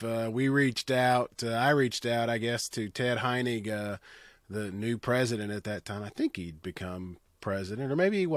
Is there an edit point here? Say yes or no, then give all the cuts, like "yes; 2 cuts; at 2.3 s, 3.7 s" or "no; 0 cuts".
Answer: no; 0 cuts